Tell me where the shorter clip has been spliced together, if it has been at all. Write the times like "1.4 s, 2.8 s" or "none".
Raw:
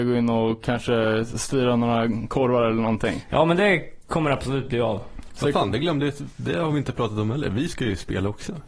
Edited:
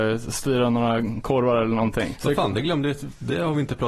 2.2 s